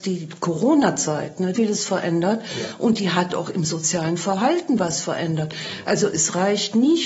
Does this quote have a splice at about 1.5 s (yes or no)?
yes